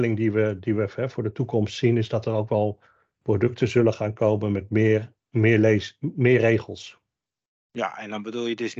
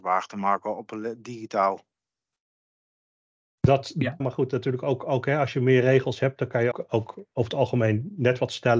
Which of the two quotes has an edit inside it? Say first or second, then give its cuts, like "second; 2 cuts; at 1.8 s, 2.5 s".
second; 2 cuts; at 4.2 s, 6.7 s